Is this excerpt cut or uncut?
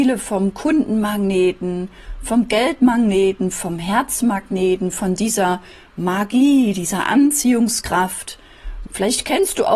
cut